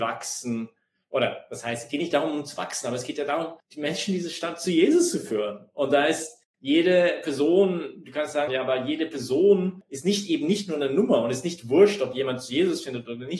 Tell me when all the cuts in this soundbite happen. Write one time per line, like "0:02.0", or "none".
0:08.5